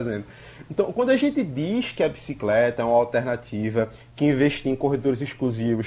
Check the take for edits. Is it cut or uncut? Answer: uncut